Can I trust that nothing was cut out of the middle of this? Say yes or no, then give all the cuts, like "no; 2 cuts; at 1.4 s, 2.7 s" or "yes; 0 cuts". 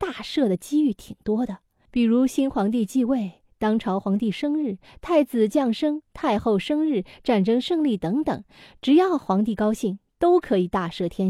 yes; 0 cuts